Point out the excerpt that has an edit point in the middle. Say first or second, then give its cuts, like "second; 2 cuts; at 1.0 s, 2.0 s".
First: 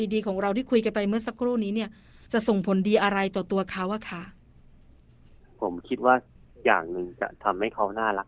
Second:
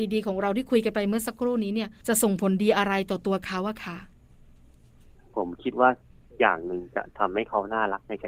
second; 1 cut; at 2.0 s